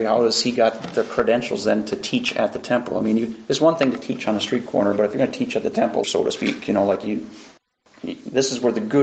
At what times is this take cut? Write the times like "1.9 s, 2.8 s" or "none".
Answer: 6.0 s